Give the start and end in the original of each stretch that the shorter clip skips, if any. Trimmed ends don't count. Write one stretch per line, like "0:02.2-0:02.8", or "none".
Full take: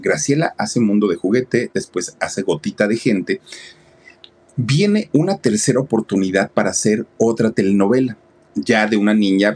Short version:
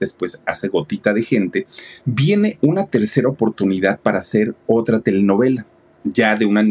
0:03.7-0:04.5